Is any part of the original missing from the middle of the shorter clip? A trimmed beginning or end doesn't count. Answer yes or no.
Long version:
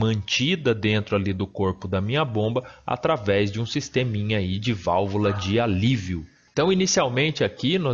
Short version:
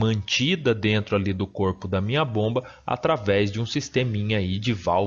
no